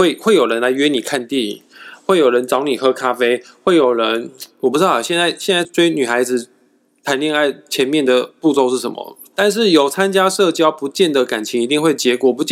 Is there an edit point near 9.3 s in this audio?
yes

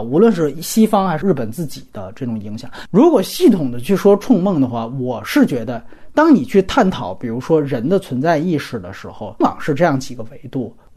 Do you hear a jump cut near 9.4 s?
yes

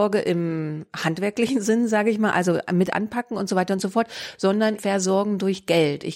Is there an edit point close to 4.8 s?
yes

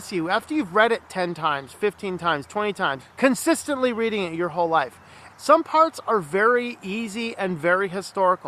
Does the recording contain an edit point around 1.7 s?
no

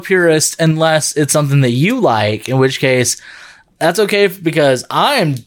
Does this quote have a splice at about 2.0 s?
no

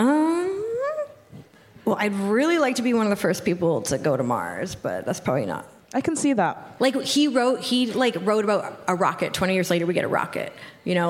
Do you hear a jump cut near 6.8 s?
yes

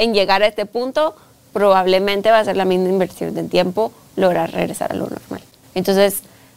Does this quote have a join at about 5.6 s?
yes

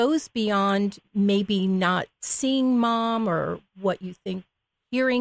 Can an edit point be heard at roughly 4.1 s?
no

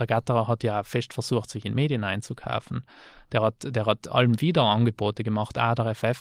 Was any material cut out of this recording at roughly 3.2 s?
no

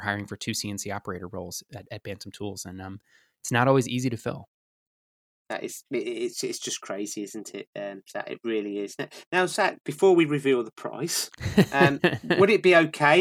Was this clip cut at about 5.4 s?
yes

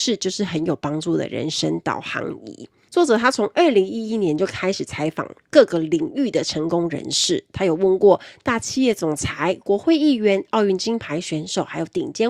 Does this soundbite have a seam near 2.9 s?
no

